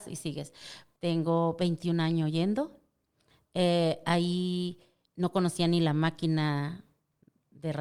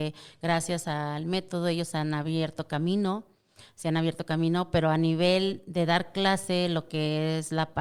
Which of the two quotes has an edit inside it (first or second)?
first